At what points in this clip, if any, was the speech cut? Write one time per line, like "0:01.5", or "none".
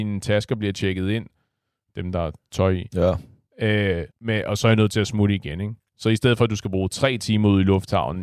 0:04.1